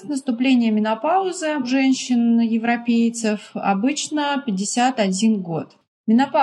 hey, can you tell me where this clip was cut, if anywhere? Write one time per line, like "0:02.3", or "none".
none